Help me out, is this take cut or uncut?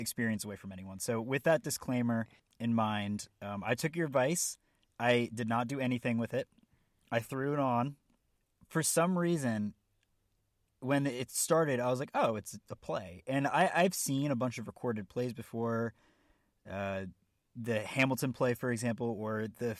uncut